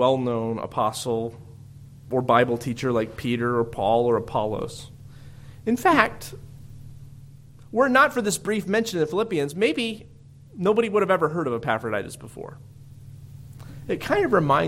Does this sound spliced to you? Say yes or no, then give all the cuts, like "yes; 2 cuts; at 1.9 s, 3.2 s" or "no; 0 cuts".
no; 0 cuts